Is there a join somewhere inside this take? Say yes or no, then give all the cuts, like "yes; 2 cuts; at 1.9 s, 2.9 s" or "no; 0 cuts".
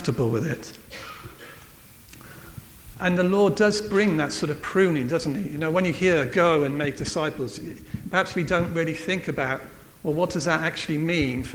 yes; 1 cut; at 2.9 s